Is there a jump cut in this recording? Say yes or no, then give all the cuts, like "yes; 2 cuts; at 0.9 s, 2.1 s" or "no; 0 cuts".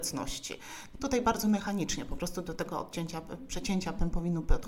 yes; 1 cut; at 0.9 s